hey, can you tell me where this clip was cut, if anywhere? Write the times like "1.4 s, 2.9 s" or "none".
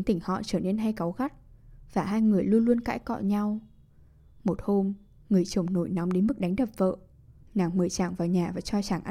7.4 s